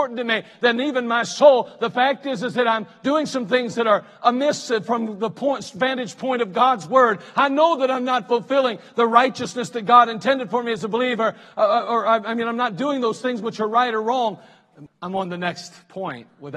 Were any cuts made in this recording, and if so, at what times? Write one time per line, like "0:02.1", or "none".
0:14.9